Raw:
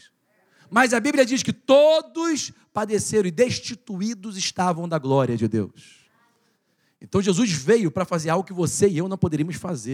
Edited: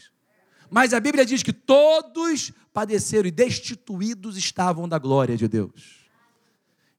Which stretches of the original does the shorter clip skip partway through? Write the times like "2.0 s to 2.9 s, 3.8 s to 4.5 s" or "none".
none